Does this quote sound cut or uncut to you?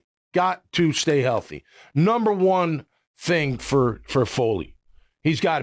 uncut